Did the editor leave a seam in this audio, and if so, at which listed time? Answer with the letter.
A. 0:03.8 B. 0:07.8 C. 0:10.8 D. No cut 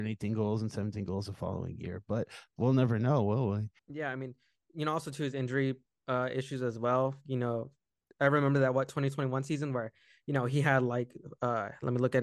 A